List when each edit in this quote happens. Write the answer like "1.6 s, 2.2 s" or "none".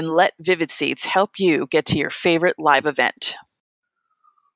none

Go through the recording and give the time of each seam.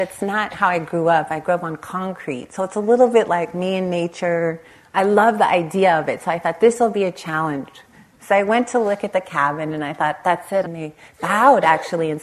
10.6 s

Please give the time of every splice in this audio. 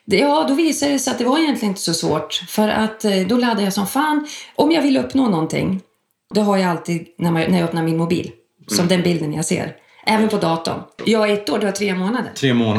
6.3 s, 11.0 s

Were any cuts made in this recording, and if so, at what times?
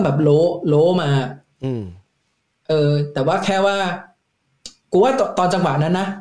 none

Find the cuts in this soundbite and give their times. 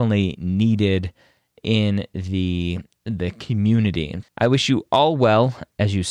4.2 s

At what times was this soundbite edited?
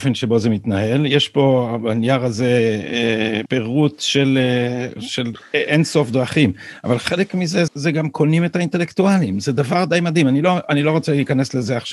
3.4 s, 7.7 s

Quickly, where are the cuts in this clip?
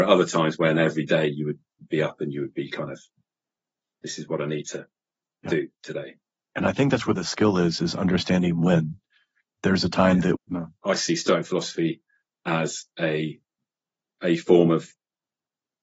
10.3 s

